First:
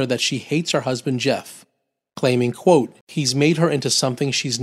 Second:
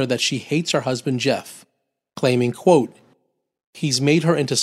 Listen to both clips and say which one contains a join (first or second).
first